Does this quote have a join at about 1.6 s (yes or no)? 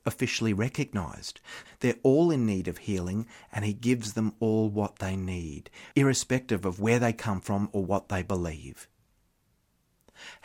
yes